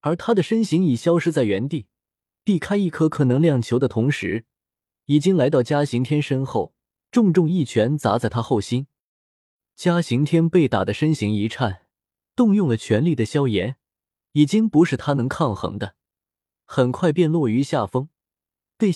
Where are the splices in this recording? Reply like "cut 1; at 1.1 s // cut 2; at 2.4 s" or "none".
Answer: none